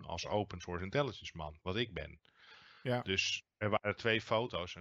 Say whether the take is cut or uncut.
uncut